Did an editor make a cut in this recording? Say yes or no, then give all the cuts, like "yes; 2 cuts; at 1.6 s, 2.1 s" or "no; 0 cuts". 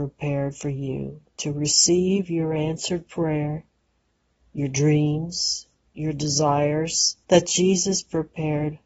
yes; 2 cuts; at 5.9 s, 7.2 s